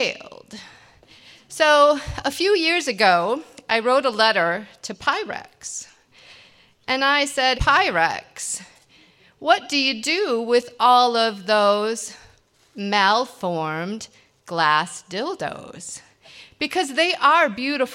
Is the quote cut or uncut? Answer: cut